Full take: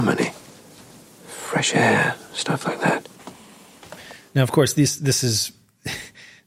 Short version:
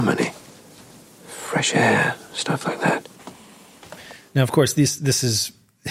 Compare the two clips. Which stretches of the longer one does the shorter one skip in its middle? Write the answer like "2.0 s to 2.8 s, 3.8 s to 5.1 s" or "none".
none